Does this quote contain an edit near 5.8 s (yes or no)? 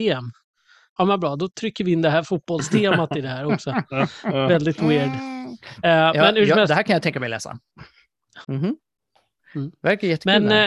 no